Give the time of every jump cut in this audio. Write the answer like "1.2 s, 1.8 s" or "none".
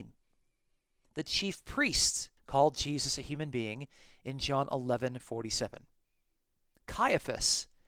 2.4 s